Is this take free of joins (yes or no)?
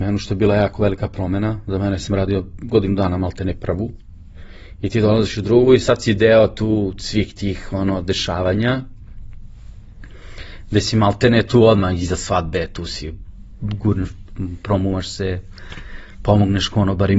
yes